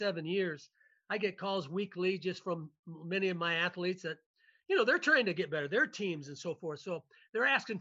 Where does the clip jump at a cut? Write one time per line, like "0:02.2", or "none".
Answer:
none